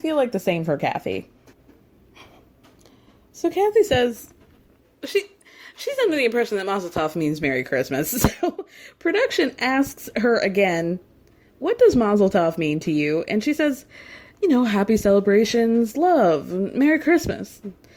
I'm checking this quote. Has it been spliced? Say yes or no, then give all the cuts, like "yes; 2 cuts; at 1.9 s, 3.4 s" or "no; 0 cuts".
no; 0 cuts